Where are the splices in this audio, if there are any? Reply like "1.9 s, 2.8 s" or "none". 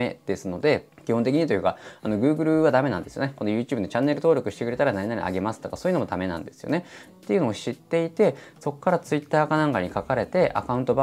7.1 s